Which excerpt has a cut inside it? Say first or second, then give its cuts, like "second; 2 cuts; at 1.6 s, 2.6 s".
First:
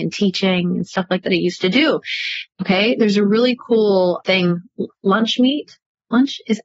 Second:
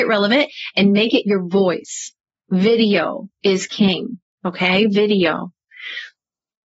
first; 3 cuts; at 1.2 s, 2.5 s, 4.2 s